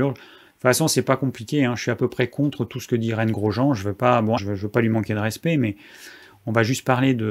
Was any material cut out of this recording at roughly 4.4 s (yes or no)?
yes